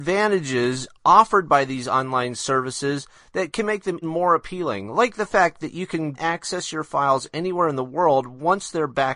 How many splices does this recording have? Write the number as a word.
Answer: two